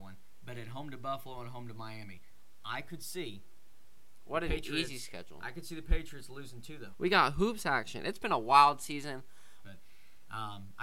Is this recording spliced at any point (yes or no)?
yes